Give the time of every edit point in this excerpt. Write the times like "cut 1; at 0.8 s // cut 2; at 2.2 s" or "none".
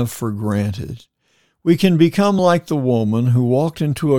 none